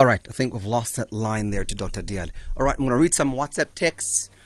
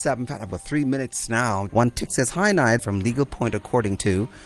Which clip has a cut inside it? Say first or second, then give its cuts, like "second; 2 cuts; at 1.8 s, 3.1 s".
second; 2 cuts; at 1.7 s, 2.8 s